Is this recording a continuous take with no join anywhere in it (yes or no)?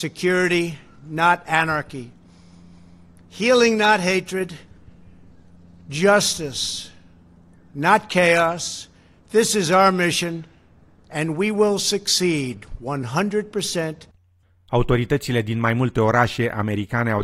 yes